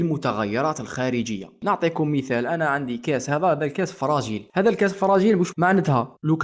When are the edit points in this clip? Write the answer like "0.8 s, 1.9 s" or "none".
5.5 s